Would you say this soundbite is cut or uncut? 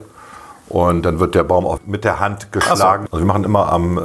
cut